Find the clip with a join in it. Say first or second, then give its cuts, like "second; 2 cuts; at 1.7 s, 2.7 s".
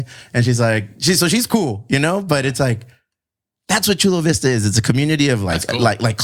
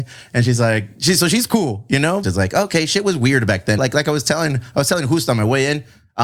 second; 2 cuts; at 2.2 s, 3.8 s